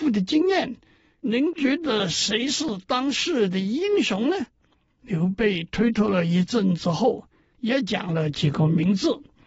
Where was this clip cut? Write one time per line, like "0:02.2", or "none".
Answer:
none